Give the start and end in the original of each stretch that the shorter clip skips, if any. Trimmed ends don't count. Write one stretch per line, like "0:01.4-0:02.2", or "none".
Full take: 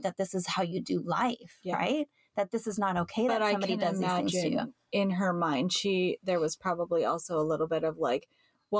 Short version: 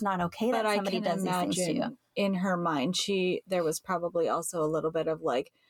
none